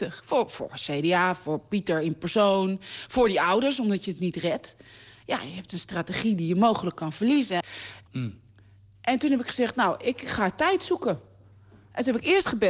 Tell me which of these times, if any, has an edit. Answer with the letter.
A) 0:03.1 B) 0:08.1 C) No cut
B